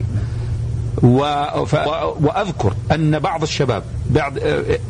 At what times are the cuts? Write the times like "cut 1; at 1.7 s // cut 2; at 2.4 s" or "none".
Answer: cut 1; at 1.9 s